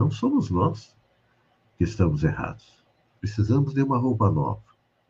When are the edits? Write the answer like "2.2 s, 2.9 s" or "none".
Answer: 3.2 s